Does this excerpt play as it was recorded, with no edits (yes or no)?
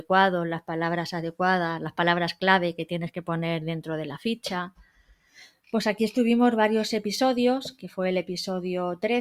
yes